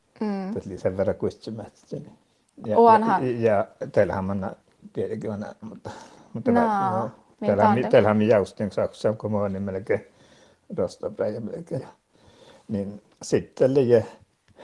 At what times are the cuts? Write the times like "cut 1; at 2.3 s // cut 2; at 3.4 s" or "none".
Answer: cut 1; at 5.6 s // cut 2; at 11.8 s